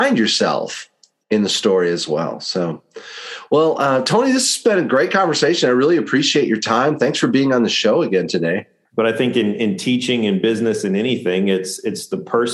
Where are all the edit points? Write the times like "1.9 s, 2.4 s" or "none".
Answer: 8.8 s